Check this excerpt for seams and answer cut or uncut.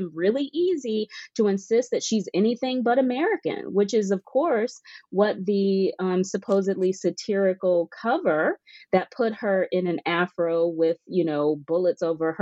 uncut